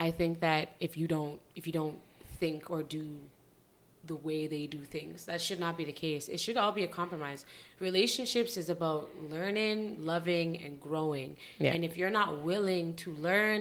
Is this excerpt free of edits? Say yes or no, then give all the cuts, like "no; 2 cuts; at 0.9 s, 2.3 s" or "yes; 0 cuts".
yes; 0 cuts